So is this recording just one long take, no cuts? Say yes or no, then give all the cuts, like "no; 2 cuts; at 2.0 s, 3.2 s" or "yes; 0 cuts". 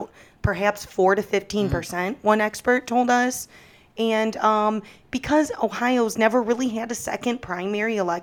yes; 0 cuts